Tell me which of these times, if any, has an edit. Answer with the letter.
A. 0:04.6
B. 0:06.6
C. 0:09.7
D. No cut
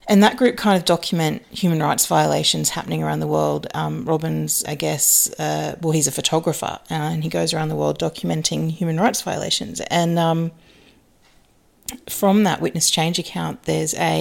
A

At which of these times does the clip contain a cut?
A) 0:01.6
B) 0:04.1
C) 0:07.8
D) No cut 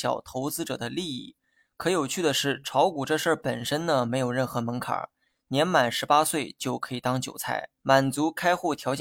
C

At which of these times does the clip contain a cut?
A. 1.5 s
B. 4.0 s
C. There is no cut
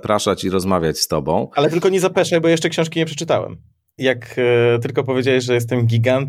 B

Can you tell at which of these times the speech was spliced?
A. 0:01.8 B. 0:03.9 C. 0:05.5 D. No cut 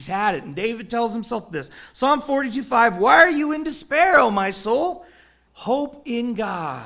C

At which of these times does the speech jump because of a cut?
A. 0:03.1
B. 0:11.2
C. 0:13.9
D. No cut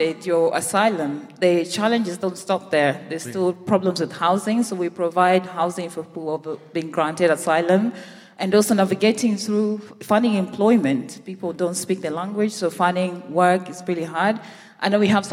D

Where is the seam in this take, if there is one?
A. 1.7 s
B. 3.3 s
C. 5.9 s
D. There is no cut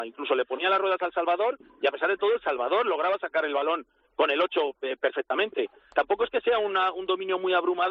C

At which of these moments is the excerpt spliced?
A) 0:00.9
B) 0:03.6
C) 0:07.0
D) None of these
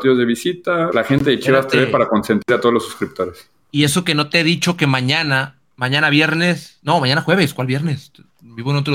A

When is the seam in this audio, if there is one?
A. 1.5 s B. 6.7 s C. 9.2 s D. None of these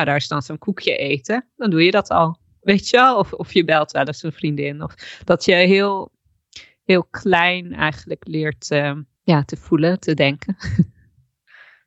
C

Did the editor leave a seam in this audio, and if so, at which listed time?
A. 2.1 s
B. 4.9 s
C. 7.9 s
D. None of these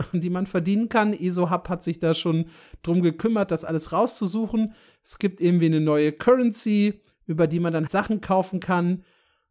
C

